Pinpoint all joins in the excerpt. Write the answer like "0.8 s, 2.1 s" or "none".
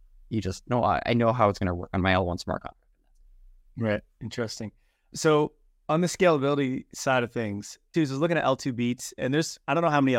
7.9 s